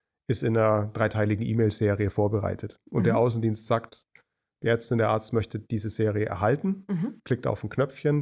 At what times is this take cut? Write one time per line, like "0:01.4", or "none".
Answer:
none